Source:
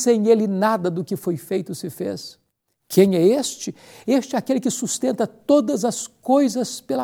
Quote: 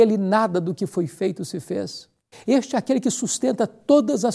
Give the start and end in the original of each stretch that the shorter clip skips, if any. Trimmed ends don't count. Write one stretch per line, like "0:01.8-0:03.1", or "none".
0:02.6-0:03.9

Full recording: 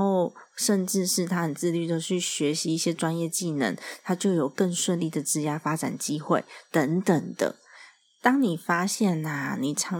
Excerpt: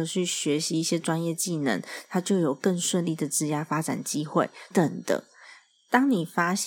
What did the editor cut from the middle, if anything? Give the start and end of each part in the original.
0:06.6-0:07.0

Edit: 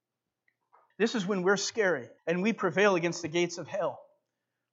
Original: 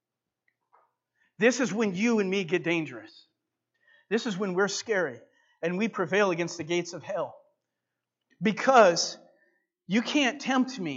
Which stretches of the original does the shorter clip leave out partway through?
0:00.9-0:04.0
0:05.3-0:05.5

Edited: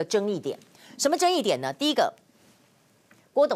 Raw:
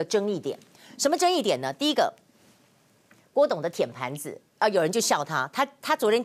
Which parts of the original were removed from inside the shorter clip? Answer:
none

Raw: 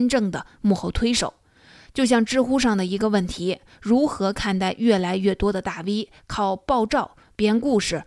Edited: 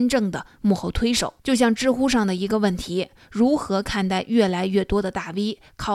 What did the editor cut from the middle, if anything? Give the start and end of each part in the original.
0:01.4-0:01.9

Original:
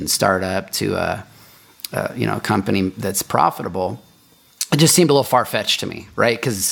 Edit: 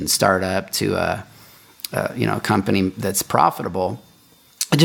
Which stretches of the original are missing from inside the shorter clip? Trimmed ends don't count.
none

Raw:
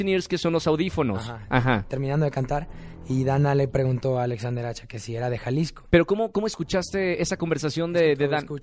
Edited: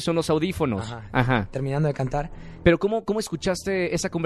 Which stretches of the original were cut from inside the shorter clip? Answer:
0:03.0-0:05.9

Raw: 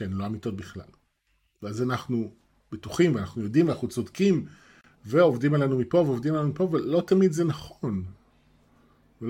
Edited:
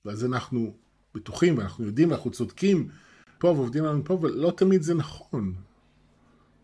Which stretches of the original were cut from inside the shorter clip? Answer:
0:05.0-0:05.9

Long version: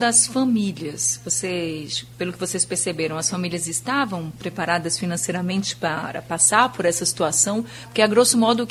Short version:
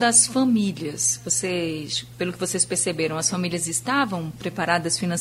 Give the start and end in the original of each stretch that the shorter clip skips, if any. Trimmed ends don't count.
none

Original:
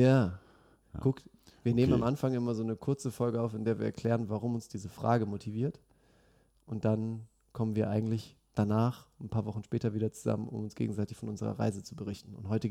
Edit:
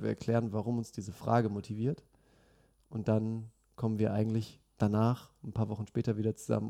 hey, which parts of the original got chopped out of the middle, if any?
none

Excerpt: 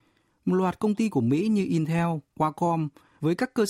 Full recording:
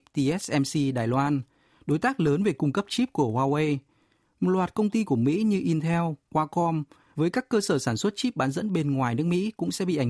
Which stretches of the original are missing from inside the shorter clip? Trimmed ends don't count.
none

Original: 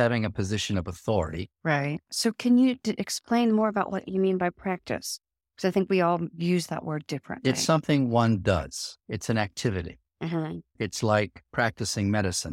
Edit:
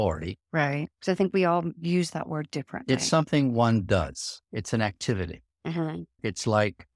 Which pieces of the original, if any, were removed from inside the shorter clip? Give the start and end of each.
0:02.0-0:05.5

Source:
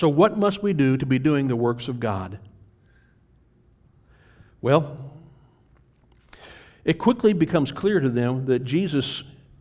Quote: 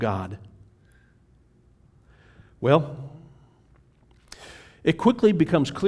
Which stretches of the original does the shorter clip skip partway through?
none

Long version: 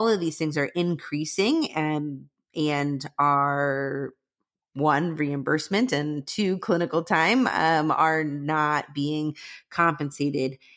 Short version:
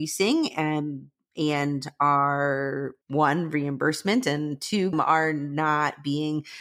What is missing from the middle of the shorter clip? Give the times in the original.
0:04.2-0:04.7
0:06.6-0:07.8

